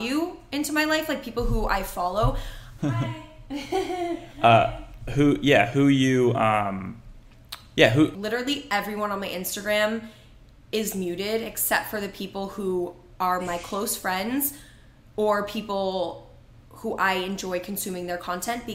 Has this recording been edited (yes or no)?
yes